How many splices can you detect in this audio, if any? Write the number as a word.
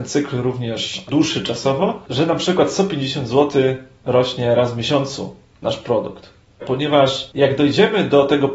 one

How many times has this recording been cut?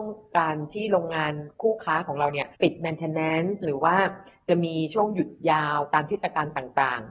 one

